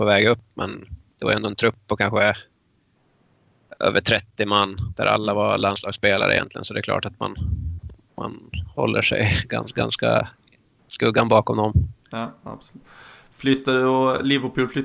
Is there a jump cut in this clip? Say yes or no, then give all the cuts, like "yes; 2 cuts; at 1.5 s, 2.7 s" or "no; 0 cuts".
no; 0 cuts